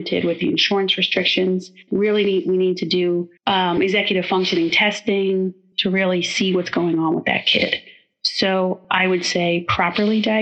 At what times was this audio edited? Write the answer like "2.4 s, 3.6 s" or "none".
1.9 s